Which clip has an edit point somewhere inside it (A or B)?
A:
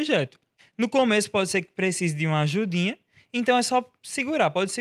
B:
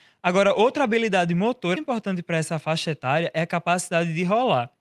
B